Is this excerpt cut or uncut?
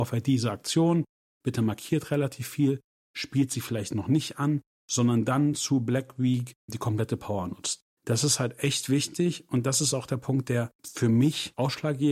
uncut